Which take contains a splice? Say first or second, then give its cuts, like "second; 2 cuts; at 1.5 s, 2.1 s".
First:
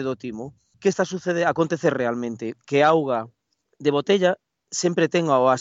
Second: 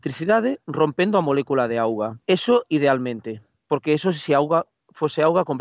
second; 1 cut; at 2.2 s